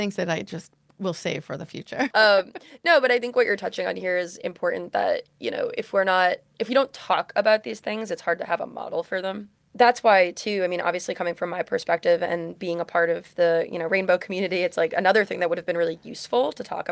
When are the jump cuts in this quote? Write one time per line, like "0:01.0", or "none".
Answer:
0:02.1